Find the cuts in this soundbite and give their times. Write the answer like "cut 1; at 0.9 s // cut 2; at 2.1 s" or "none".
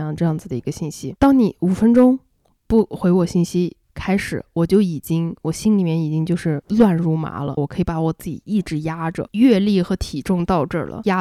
cut 1; at 7.6 s